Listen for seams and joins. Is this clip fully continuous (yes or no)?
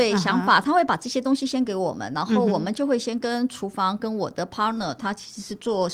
yes